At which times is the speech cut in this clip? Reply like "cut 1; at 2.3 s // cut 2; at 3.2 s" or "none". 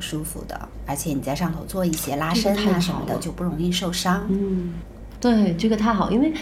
none